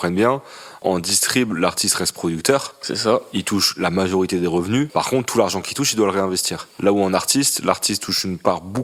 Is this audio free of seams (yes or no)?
no